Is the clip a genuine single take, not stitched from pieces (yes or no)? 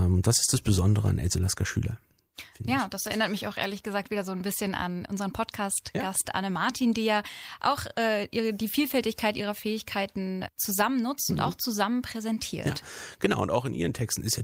yes